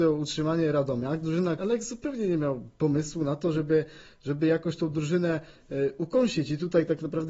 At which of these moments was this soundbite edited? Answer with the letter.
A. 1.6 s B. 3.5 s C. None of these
A